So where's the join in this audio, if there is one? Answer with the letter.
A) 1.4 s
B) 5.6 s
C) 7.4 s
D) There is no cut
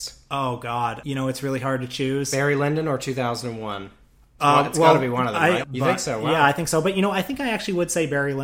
B